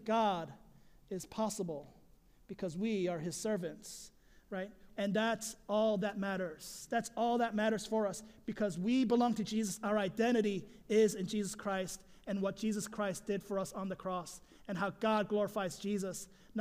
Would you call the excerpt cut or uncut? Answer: cut